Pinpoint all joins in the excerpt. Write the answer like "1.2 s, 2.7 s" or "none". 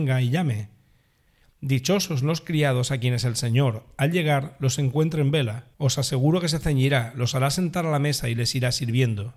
5.7 s